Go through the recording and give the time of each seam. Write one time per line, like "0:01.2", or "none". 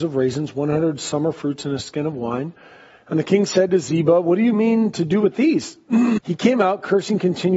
0:06.2